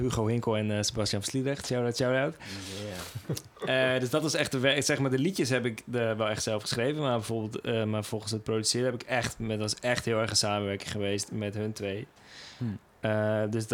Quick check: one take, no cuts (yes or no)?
yes